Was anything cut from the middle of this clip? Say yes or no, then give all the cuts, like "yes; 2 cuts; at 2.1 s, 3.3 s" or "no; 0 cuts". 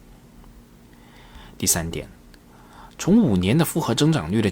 no; 0 cuts